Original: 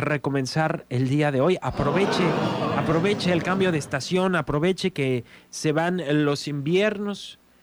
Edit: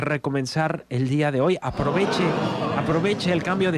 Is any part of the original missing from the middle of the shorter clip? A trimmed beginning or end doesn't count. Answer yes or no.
no